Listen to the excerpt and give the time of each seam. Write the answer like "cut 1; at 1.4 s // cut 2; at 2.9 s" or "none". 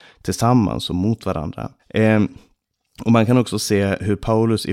cut 1; at 1.8 s